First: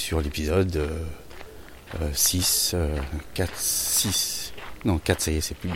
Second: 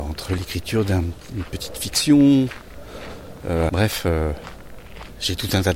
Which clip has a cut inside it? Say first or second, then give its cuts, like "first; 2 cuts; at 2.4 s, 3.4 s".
second; 1 cut; at 3.7 s